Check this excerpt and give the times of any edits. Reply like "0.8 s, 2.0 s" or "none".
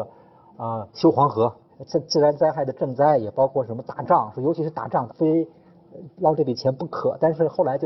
1.7 s, 5.1 s